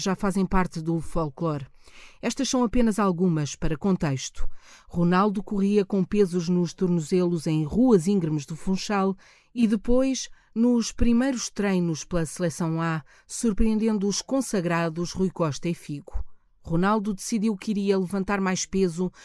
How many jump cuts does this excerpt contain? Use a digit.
0